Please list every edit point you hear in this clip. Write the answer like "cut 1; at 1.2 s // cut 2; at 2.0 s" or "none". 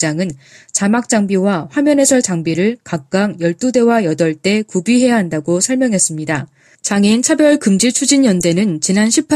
cut 1; at 6.7 s